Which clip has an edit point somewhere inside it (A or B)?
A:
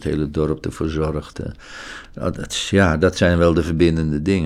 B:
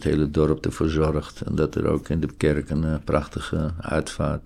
A